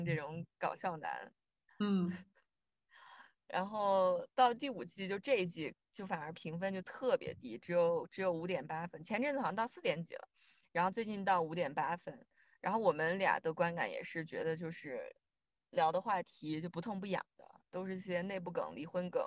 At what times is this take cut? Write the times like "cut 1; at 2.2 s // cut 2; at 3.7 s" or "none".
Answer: none